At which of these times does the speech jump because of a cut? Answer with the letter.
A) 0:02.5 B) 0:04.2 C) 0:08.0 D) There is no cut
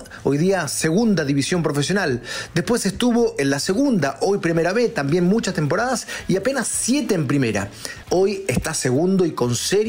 C